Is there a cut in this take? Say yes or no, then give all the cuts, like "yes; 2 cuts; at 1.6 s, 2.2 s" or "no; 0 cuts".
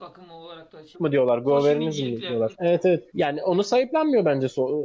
yes; 2 cuts; at 0.9 s, 2.5 s